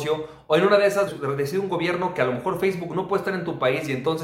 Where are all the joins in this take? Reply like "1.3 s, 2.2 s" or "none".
1.1 s

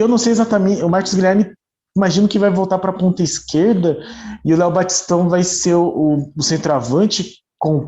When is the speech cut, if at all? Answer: none

